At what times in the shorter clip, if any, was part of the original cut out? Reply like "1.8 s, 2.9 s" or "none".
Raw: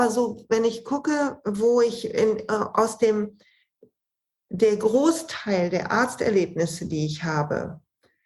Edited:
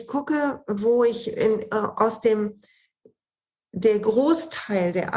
none

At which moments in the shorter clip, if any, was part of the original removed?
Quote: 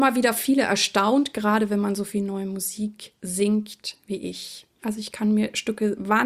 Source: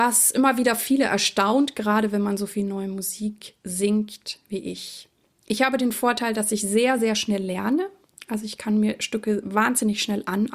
4.8 s

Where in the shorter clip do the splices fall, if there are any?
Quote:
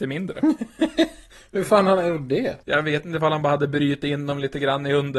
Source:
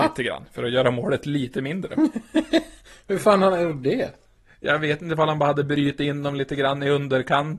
2.6 s

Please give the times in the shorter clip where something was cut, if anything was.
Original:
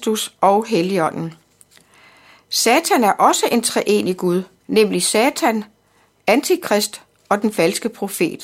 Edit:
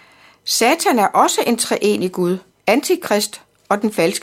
2.5 s

